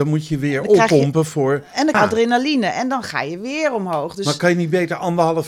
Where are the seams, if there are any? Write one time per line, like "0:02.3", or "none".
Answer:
0:01.9